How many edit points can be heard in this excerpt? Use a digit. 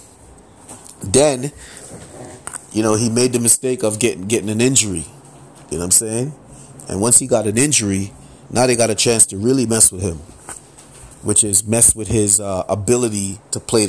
0